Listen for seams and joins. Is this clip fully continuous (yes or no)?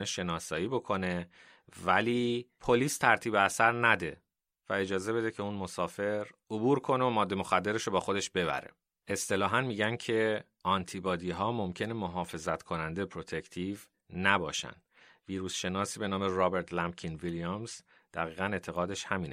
yes